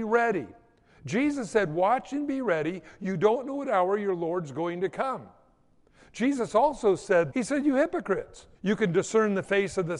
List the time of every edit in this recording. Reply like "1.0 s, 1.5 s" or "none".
7.3 s, 8.5 s